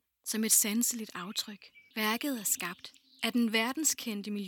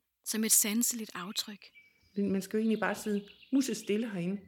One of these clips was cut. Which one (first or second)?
first